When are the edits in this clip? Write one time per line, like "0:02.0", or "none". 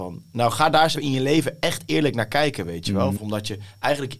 0:00.9
0:03.2